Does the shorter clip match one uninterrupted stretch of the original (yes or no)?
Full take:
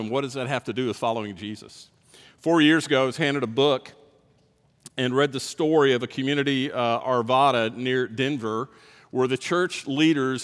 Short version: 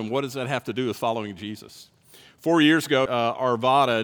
no